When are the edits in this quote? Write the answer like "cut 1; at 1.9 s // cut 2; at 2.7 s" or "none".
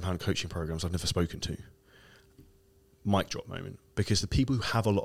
none